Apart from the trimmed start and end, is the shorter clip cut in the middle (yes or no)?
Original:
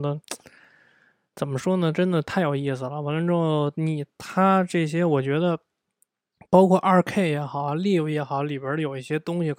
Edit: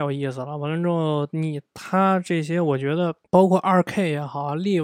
yes